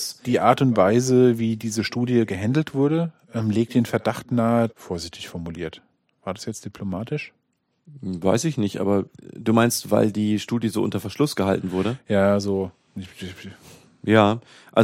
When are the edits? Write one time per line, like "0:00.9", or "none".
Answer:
0:04.7

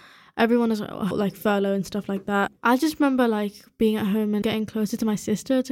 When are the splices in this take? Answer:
0:01.1
0:02.6
0:04.4

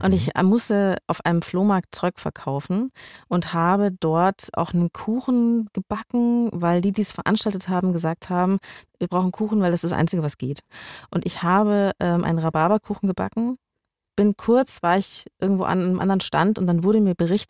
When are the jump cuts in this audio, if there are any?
none

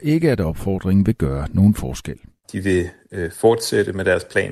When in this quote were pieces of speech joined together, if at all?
0:02.4

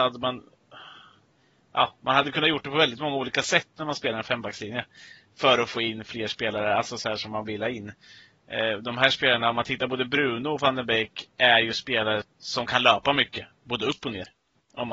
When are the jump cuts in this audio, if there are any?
0:12.2

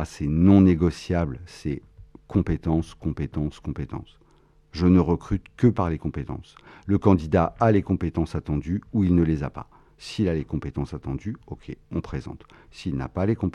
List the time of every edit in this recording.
none

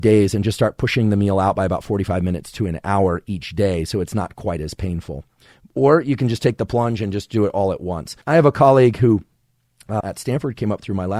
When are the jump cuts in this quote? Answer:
0:08.2
0:10.0

